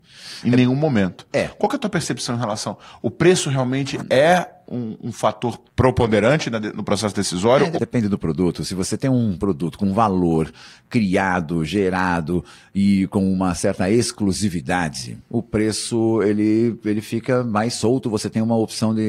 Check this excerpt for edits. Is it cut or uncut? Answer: cut